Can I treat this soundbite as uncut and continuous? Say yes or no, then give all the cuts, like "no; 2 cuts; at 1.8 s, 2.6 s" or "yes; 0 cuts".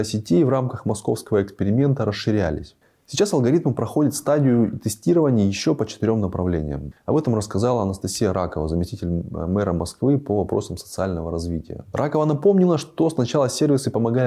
no; 1 cut; at 7.0 s